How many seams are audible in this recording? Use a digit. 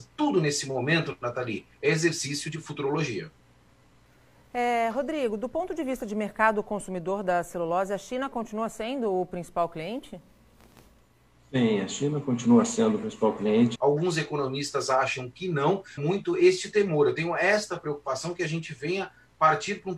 2